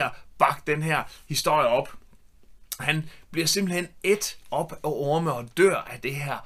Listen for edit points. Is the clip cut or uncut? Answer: cut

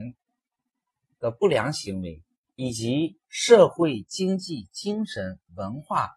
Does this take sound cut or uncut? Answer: uncut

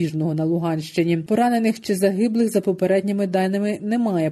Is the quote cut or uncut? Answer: uncut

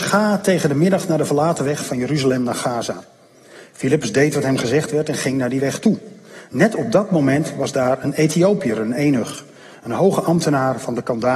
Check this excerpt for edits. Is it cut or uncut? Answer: uncut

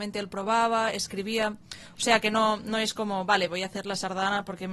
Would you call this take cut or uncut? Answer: uncut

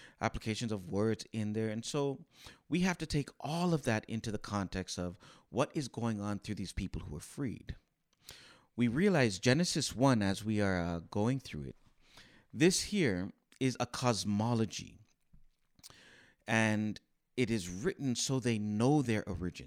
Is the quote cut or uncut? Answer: uncut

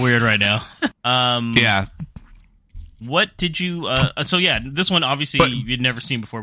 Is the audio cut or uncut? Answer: cut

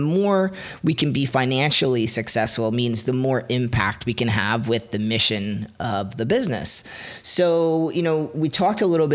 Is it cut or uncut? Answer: uncut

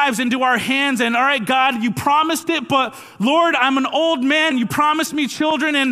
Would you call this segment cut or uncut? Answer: cut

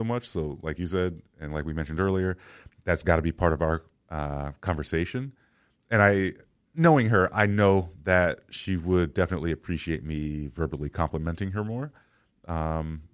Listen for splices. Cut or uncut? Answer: uncut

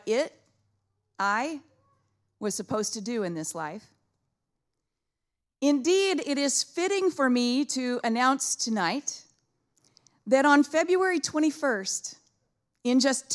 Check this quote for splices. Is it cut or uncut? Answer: uncut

